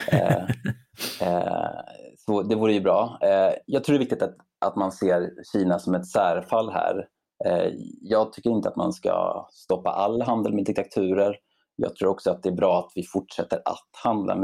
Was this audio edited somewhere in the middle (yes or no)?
no